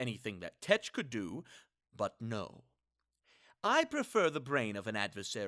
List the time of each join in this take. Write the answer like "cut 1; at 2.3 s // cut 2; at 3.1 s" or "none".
none